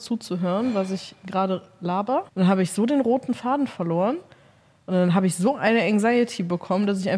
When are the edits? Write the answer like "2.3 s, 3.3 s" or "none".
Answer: 2.3 s